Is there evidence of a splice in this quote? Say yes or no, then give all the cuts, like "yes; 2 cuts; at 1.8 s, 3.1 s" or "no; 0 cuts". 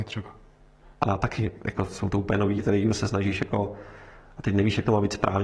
yes; 2 cuts; at 0.9 s, 2.6 s